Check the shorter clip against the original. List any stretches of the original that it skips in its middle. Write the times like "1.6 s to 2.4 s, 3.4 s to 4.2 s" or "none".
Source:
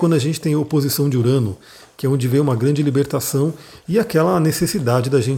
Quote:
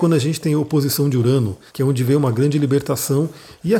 1.7 s to 1.9 s